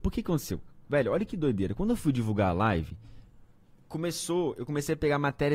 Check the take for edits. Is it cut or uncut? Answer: uncut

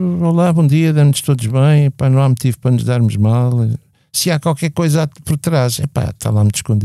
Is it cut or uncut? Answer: uncut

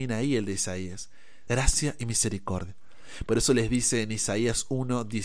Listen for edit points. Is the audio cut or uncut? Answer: cut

